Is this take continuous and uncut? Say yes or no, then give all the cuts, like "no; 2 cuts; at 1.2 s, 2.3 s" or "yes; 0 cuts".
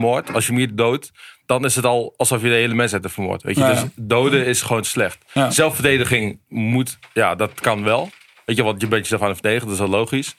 yes; 0 cuts